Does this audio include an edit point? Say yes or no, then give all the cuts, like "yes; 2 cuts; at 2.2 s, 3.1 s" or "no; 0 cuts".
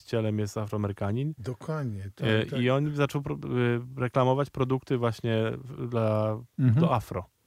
no; 0 cuts